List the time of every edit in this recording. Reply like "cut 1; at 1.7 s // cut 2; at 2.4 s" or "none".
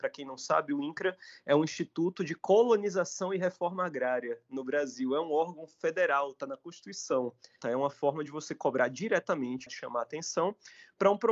cut 1; at 7.6 s // cut 2; at 9.7 s